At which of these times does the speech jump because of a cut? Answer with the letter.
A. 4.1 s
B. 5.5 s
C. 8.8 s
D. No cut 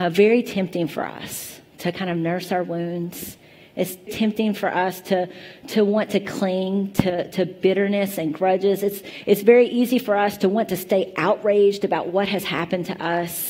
A